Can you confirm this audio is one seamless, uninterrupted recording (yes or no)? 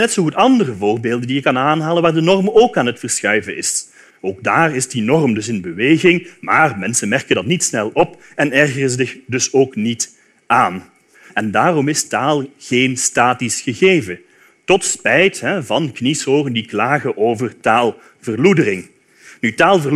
no